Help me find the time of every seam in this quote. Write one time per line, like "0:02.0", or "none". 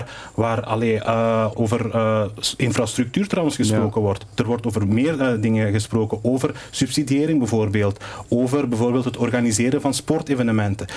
0:01.5